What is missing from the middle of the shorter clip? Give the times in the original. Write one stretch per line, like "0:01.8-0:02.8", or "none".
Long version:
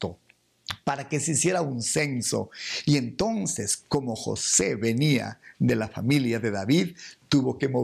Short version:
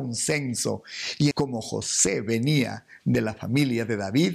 0:03.0-0:03.9